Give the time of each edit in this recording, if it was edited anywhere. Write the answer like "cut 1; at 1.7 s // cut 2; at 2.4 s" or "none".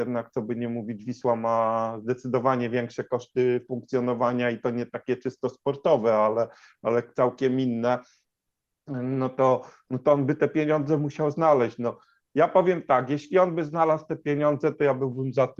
none